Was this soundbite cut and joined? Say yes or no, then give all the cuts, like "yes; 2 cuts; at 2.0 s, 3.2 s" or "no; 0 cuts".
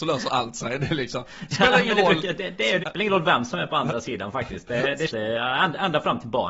yes; 2 cuts; at 2.8 s, 5.1 s